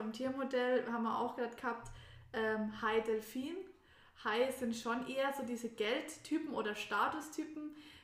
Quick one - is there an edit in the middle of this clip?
no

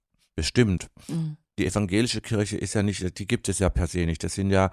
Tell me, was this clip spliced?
no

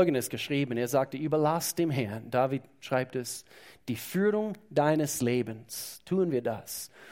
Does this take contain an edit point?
no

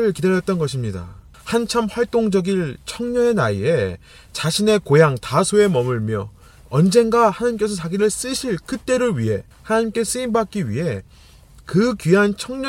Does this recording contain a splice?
yes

